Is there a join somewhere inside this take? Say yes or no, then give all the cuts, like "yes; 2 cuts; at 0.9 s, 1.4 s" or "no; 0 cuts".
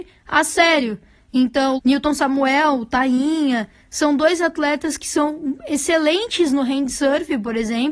yes; 1 cut; at 1.8 s